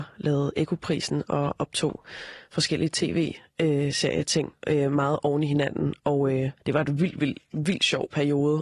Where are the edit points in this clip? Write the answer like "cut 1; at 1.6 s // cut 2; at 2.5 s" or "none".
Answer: cut 1; at 6.6 s